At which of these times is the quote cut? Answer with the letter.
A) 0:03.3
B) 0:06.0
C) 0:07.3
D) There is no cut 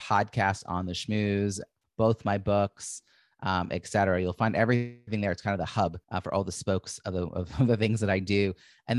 B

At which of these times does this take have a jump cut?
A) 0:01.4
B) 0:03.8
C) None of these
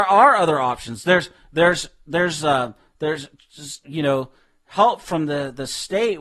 B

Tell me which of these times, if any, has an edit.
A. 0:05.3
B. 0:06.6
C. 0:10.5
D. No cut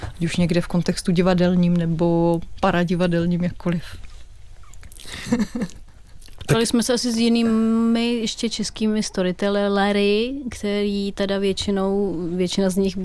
A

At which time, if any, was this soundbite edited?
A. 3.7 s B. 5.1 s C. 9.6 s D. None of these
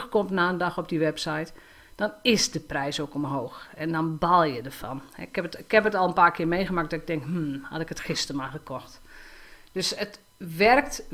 D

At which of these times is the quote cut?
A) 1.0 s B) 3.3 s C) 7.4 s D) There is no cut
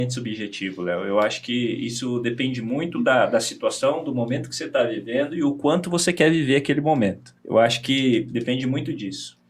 C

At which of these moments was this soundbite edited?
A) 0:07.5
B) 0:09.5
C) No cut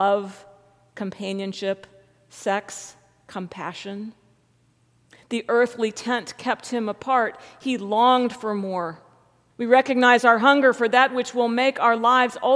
B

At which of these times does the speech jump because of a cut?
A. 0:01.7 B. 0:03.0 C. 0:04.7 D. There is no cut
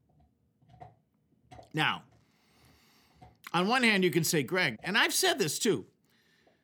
C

